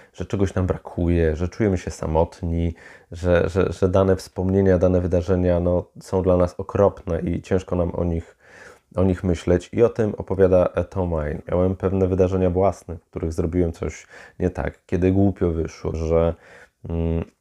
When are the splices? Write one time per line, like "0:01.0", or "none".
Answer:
0:11.4
0:15.9